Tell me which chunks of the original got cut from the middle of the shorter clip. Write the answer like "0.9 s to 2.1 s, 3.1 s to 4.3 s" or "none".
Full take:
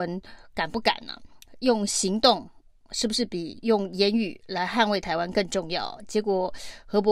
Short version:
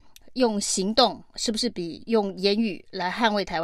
2.5 s to 2.8 s